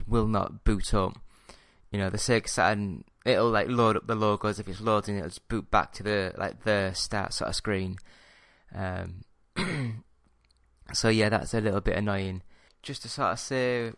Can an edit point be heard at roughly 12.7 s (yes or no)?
yes